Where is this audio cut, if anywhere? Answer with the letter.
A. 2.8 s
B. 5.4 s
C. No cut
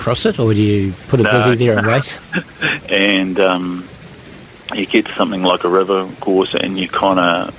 A